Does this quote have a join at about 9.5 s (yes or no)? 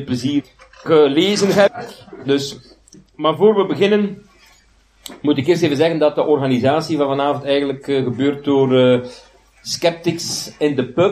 no